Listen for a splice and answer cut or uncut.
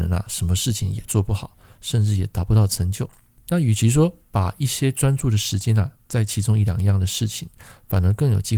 uncut